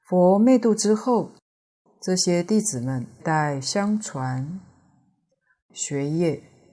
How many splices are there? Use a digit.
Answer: 2